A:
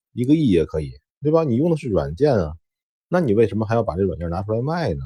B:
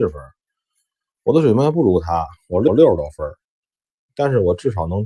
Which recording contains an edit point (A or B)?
A